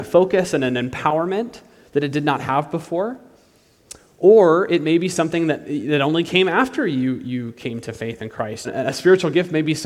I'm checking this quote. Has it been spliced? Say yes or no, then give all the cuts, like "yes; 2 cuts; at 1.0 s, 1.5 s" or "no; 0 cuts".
yes; 1 cut; at 8.6 s